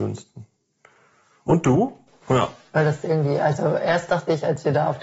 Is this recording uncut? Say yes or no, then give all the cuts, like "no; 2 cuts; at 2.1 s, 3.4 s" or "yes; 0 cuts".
no; 1 cut; at 2.2 s